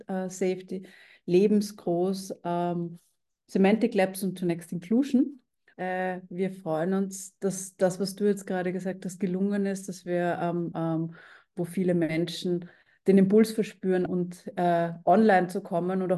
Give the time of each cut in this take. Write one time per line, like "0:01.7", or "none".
0:05.7
0:10.7
0:14.1